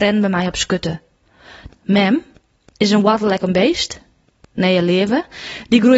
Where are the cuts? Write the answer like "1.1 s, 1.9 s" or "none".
1.7 s